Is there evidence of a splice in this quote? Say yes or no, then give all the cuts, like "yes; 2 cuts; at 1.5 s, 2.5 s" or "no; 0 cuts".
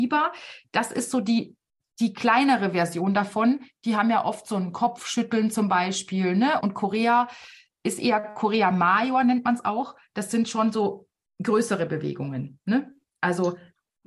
yes; 1 cut; at 6.6 s